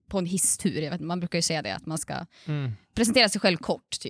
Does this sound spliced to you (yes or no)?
no